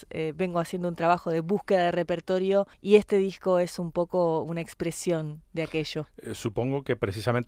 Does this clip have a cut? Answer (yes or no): yes